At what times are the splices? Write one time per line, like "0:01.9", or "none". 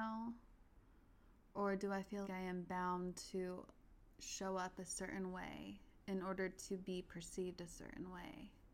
0:02.2
0:04.1